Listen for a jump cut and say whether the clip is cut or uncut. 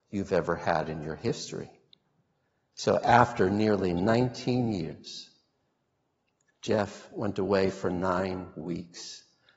uncut